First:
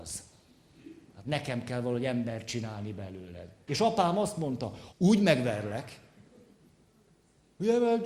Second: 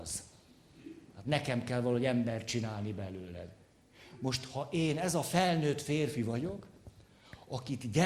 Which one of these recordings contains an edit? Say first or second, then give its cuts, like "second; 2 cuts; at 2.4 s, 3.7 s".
first; 2 cuts; at 3.7 s, 4.9 s